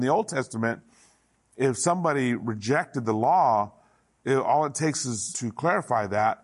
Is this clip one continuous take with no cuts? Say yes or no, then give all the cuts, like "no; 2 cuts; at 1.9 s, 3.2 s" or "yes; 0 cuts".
no; 1 cut; at 5.3 s